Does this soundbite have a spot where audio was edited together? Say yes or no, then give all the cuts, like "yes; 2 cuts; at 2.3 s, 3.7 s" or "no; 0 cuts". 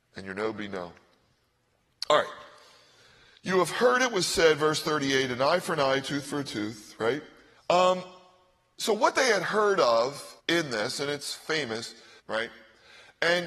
yes; 3 cuts; at 7.6 s, 10.4 s, 12.2 s